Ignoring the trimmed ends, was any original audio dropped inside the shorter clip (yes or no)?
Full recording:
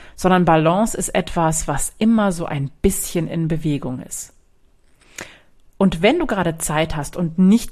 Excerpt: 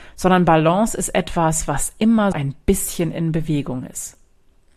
yes